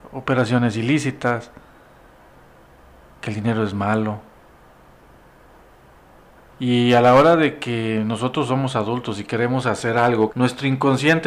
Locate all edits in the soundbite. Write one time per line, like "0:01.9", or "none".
0:06.5
0:10.3